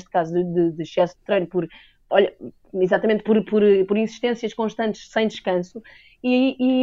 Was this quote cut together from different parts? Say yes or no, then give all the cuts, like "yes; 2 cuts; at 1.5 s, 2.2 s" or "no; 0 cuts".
no; 0 cuts